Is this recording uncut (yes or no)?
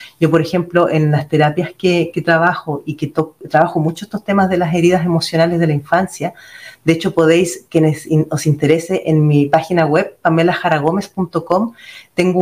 yes